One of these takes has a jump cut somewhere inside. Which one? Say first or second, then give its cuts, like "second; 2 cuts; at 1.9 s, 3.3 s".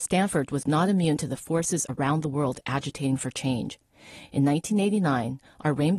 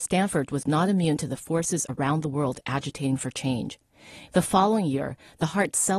second; 1 cut; at 4.3 s